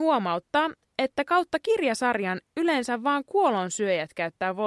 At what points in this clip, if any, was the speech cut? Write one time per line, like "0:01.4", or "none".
none